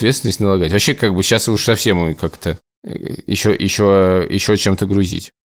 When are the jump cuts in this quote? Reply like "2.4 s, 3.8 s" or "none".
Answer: none